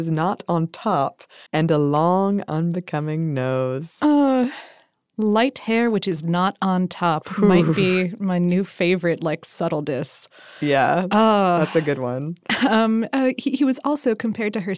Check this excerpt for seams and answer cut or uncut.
cut